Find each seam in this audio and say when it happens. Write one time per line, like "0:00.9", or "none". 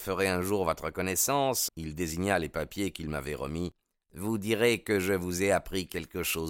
0:01.7